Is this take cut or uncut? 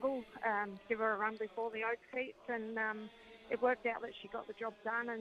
cut